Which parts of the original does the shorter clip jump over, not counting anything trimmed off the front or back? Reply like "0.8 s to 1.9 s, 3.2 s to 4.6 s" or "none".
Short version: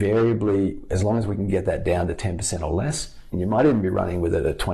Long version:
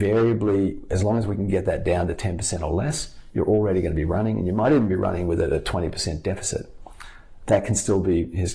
3.3 s to 4.4 s